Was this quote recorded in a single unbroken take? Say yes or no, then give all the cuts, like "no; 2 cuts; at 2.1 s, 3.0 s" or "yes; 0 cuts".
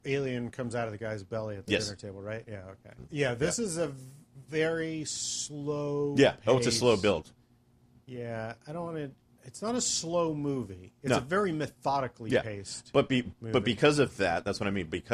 no; 1 cut; at 3.0 s